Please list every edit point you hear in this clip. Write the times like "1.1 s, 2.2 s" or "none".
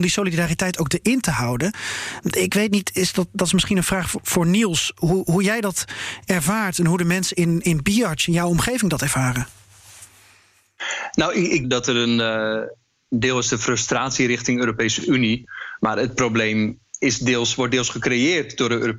11.6 s, 15.8 s